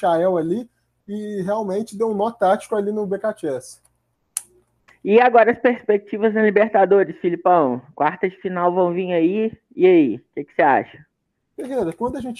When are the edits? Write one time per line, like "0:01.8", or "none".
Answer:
none

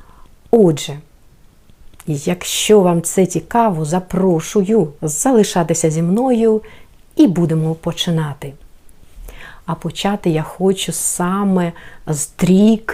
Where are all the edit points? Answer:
0:05.0

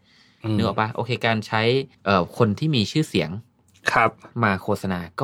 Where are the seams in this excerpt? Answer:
0:01.9

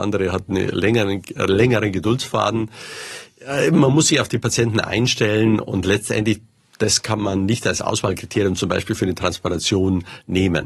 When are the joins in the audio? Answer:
none

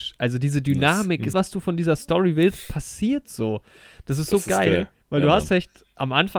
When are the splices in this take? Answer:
0:01.3
0:05.0

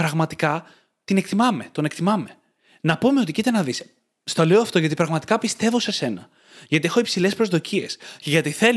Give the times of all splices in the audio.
none

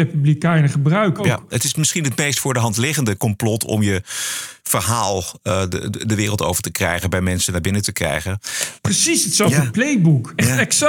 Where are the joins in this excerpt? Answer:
0:01.2
0:08.8

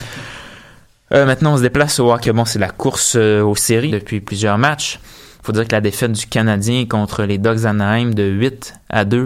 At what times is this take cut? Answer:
0:02.2
0:03.9

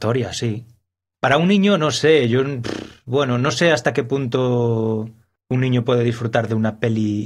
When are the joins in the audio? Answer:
none

